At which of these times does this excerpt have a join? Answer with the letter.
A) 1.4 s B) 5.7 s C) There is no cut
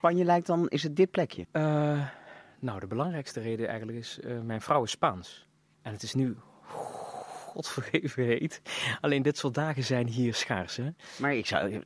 A